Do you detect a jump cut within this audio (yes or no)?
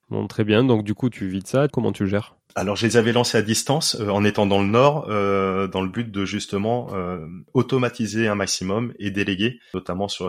yes